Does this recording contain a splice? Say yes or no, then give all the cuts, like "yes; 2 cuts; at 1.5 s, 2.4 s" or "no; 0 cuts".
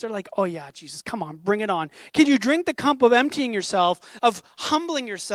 yes; 2 cuts; at 2.1 s, 4.2 s